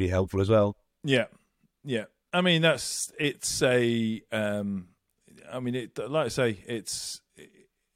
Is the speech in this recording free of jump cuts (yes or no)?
yes